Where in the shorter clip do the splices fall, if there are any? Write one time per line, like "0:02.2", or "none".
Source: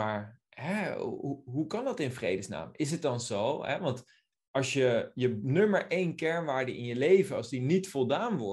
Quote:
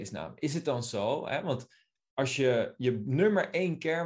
none